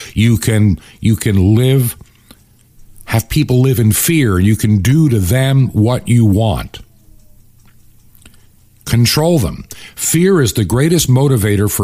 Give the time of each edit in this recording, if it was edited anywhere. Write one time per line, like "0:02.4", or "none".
none